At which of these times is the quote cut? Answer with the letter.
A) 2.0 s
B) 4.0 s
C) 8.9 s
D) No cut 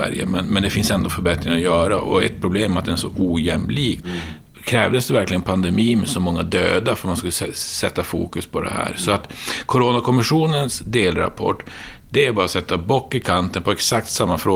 B